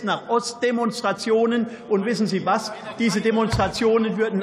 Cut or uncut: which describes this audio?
uncut